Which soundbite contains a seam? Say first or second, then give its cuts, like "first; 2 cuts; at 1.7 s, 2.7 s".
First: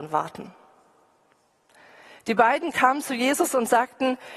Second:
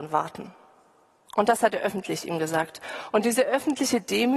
second; 1 cut; at 1.3 s